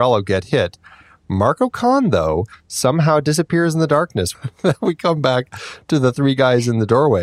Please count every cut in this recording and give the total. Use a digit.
1